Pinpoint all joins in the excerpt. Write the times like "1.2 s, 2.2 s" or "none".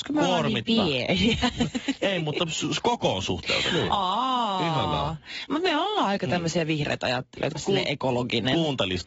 7.5 s